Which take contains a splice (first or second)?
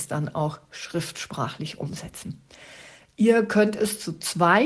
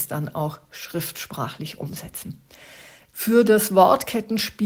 second